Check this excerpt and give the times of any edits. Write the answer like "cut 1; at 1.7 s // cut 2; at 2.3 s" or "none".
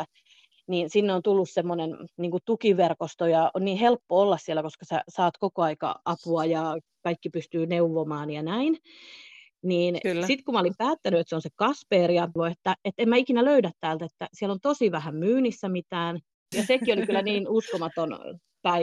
cut 1; at 12.4 s // cut 2; at 16.5 s

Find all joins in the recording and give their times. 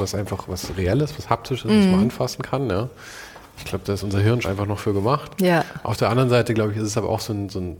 cut 1; at 4.4 s

